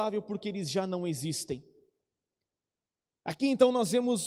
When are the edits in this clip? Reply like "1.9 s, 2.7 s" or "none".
none

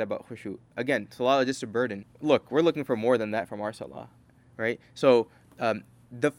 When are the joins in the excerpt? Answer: 2.0 s

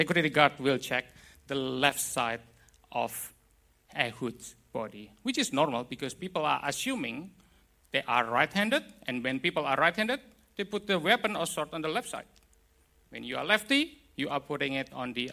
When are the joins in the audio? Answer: none

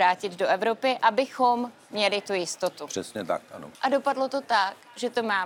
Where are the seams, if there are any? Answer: 3.7 s

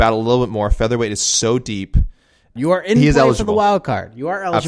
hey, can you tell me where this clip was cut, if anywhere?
2.6 s

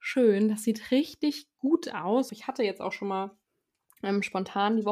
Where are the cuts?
2.3 s

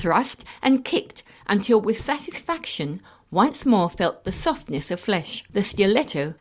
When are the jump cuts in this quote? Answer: none

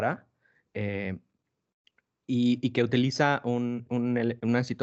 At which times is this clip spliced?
3.9 s

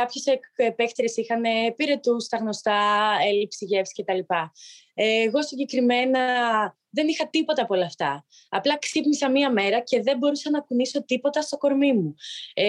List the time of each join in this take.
none

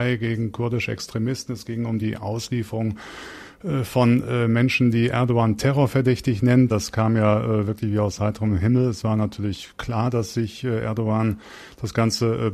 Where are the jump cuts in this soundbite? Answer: 6.7 s

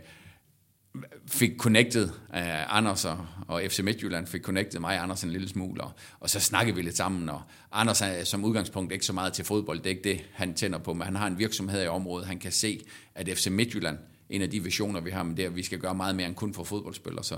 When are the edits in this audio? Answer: none

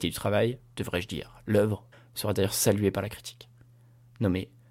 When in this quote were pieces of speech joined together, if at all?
1.9 s

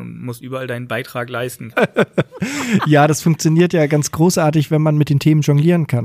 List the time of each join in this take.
1.7 s

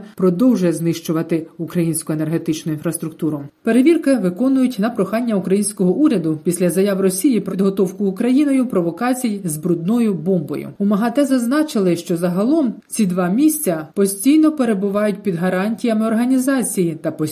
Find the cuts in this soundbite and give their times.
3.6 s, 7.5 s

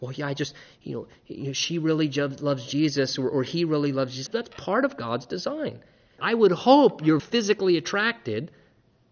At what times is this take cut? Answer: 4.3 s, 6.2 s, 7.2 s

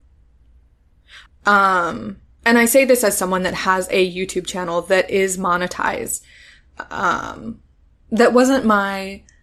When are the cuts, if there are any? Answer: 1.3 s

